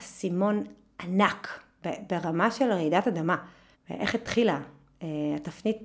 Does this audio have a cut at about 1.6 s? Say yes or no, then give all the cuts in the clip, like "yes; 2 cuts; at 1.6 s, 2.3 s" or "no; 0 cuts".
no; 1 cut; at 3.7 s